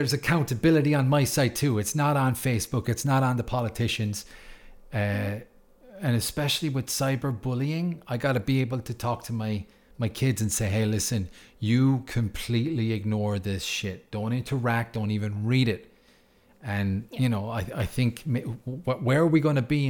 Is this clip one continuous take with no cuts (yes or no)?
yes